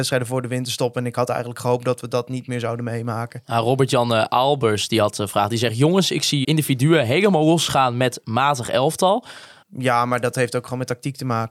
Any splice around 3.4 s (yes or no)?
no